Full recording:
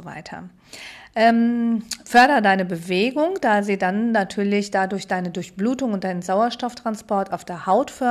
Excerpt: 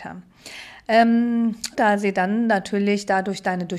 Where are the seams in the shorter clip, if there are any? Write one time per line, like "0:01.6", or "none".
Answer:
0:01.7